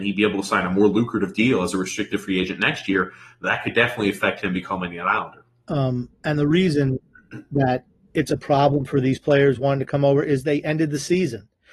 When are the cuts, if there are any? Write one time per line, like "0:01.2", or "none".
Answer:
0:05.6